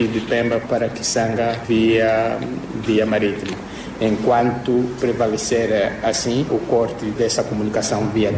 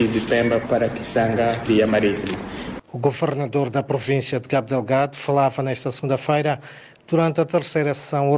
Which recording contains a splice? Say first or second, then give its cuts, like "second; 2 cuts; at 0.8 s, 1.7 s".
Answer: second; 2 cuts; at 1.7 s, 2.8 s